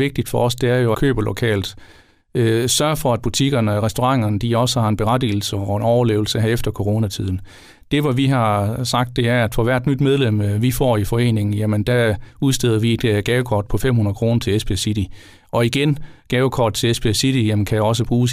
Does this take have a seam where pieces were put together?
yes; 1 cut; at 0.9 s

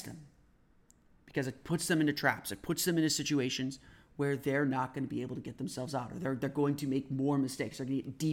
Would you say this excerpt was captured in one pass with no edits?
yes; 0 cuts

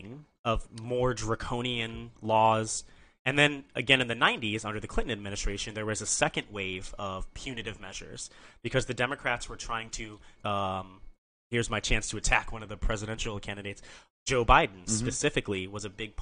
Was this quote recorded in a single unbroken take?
no; 1 cut; at 10.4 s

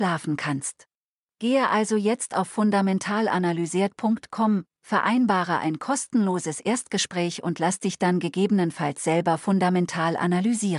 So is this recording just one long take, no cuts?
yes; 0 cuts

